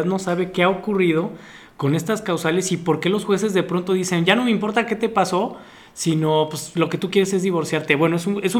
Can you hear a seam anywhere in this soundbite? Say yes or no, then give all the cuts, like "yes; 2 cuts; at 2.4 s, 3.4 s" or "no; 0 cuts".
no; 0 cuts